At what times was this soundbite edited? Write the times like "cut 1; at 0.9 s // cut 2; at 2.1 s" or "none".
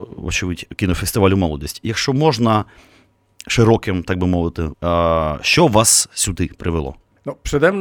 cut 1; at 4.7 s

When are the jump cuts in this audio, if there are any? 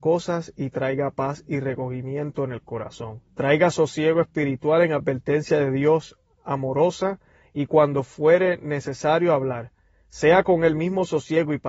cut 1; at 3.3 s

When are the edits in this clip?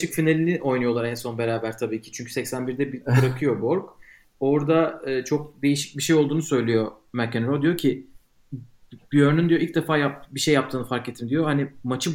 none

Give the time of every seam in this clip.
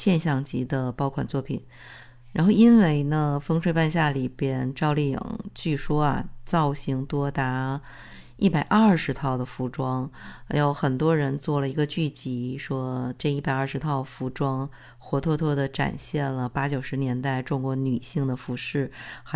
none

